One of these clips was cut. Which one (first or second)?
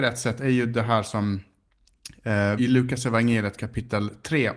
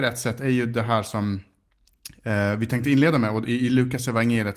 first